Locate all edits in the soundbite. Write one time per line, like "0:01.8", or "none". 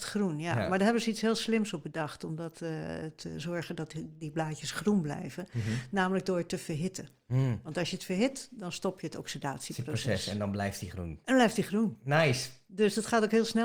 none